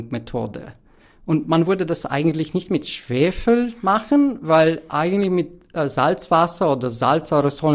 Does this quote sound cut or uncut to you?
uncut